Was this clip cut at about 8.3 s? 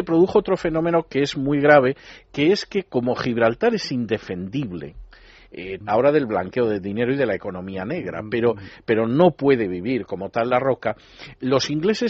no; 1 cut; at 5.8 s

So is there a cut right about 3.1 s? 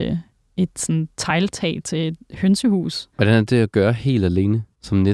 yes; 1 cut; at 3.1 s

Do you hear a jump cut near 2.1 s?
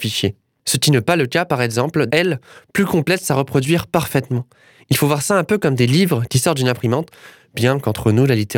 yes; 1 cut; at 2.1 s

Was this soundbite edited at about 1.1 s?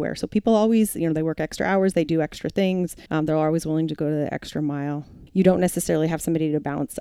no; 2 cuts; at 3.1 s, 5.3 s

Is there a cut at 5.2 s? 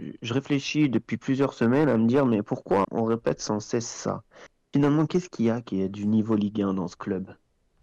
no; 1 cut; at 2.8 s

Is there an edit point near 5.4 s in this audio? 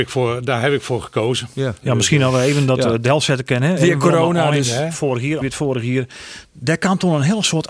yes; 2 cuts; at 5.4 s, 6.4 s

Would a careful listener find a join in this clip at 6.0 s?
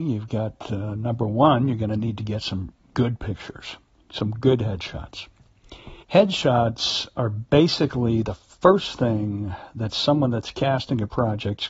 yes; 1 cut; at 6.0 s

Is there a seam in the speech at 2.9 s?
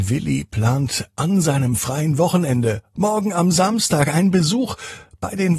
no; 0 cuts

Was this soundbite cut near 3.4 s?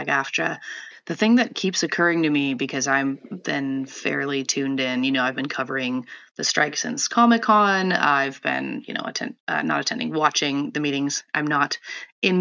no; 1 cut; at 0.9 s

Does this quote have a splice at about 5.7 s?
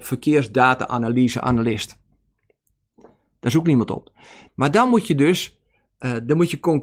no; 1 cut; at 4.5 s

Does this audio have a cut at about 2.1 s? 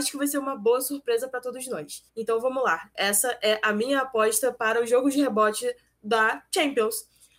yes; 1 cut; at 2.1 s

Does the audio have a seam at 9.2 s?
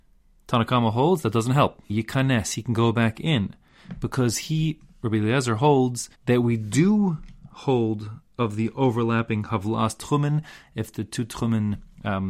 no; 2 cuts; at 1.9 s, 6.1 s

